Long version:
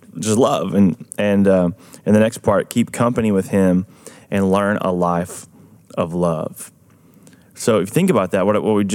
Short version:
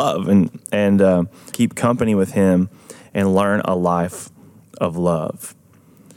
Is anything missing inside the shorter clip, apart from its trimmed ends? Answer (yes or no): yes